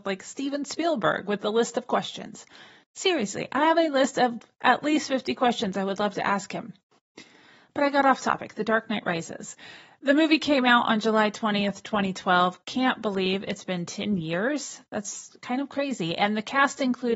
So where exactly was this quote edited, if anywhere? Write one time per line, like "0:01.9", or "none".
none